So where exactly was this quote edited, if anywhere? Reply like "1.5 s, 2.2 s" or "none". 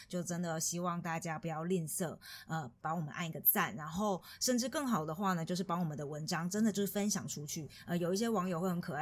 none